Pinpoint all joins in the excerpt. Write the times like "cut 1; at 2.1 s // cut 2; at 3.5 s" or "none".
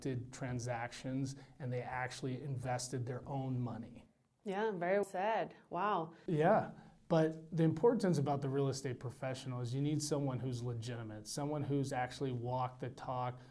cut 1; at 5.0 s // cut 2; at 6.3 s